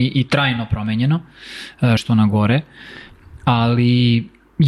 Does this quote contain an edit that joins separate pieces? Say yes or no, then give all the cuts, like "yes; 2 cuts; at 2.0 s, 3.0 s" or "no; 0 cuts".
yes; 1 cut; at 2.0 s